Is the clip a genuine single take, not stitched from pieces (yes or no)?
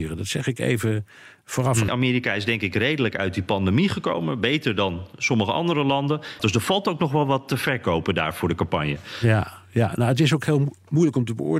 no